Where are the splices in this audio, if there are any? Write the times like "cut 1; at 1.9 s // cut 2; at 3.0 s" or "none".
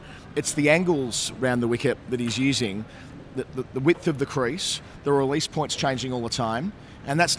none